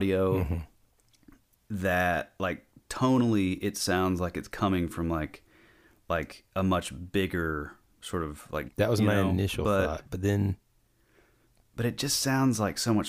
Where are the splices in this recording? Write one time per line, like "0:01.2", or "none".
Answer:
0:08.7